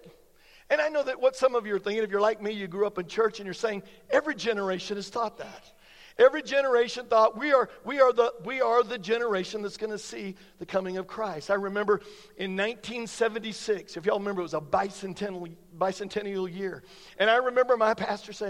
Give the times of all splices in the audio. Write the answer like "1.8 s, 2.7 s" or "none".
none